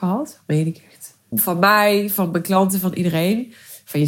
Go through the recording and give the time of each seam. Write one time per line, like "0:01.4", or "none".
0:01.3